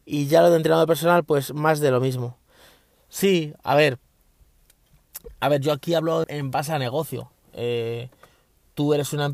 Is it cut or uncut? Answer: cut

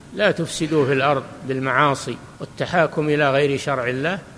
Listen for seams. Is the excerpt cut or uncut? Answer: cut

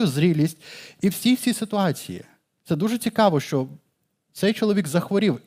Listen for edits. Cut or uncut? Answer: uncut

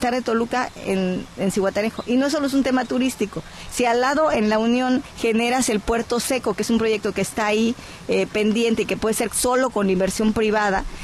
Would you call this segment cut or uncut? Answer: uncut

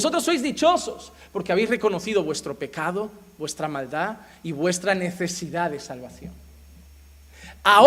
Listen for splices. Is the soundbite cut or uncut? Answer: uncut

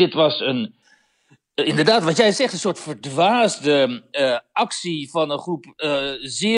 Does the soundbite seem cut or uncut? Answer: uncut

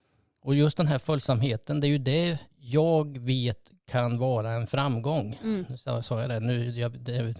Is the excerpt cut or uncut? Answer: cut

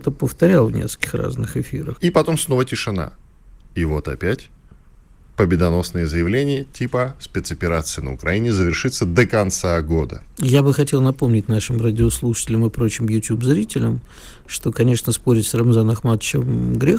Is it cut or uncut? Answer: cut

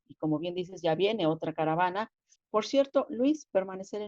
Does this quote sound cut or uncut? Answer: cut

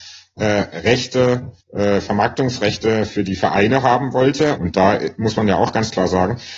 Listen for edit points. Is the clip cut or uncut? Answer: cut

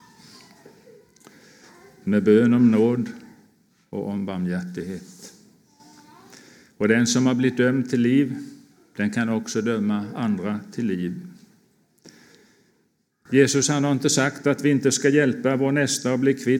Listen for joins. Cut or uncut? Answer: uncut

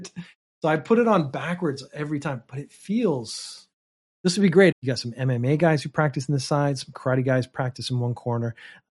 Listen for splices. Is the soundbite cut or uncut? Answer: cut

